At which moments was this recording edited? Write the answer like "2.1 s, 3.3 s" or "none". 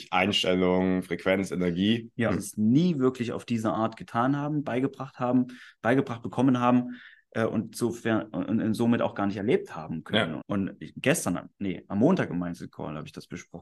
2.3 s, 10.4 s